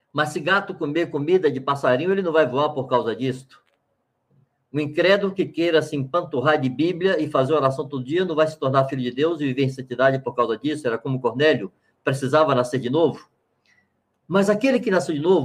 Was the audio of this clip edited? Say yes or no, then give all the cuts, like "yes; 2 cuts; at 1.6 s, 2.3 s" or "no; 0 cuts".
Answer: no; 0 cuts